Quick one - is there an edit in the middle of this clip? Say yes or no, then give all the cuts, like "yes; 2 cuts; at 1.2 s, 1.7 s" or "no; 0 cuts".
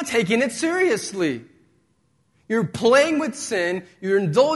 no; 0 cuts